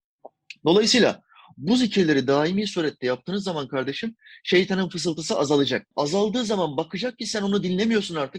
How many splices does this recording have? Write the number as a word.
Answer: one